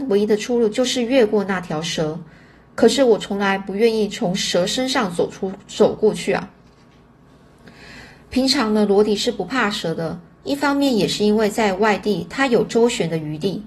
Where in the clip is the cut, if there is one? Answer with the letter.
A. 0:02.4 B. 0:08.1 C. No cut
C